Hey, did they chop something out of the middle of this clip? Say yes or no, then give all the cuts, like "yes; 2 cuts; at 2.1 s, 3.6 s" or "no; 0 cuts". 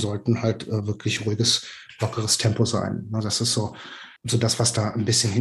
yes; 1 cut; at 4.2 s